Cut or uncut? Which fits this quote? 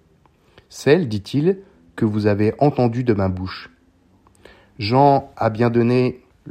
uncut